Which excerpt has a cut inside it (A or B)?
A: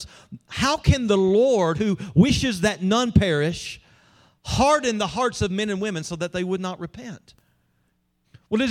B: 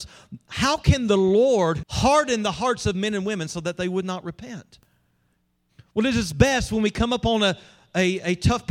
B